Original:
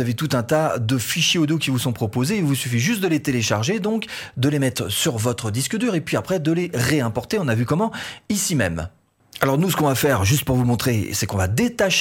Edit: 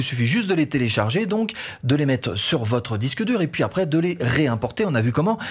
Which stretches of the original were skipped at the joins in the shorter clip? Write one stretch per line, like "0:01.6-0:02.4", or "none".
none